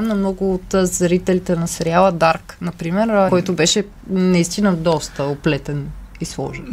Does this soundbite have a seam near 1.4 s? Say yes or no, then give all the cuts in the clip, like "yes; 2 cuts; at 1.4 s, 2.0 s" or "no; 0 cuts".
no; 1 cut; at 3.3 s